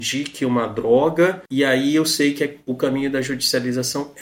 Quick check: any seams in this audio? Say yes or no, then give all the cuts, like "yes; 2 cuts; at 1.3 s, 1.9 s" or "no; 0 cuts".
yes; 1 cut; at 1.5 s